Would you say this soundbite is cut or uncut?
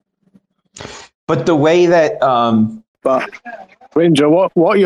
cut